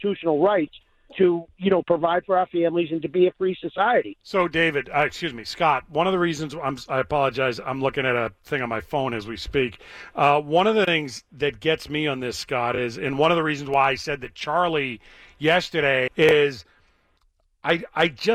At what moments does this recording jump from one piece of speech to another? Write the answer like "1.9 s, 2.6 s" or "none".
4.2 s, 16.1 s